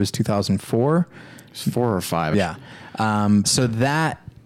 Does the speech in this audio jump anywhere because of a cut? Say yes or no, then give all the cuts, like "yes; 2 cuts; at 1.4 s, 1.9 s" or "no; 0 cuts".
yes; 2 cuts; at 2.3 s, 3.4 s